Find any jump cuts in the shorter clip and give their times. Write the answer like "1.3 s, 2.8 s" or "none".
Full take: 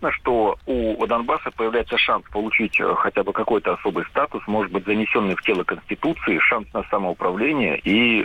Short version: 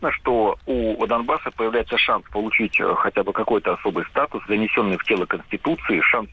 4.5 s

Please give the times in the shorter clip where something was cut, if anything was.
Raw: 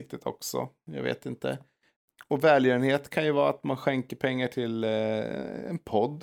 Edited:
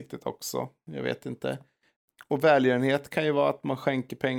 none

